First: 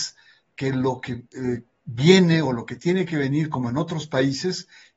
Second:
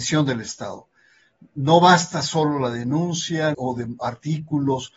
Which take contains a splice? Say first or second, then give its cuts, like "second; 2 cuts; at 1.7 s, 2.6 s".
second; 1 cut; at 3.5 s